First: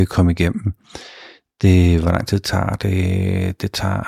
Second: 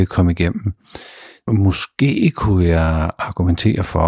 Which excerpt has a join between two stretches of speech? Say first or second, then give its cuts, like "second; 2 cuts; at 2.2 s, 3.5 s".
second; 1 cut; at 1.5 s